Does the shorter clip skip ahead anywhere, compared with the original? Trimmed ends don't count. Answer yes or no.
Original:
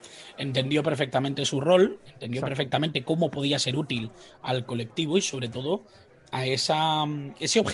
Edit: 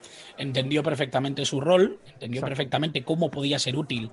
no